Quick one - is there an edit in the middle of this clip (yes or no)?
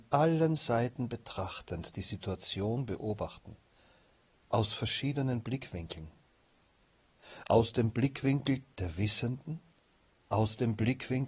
yes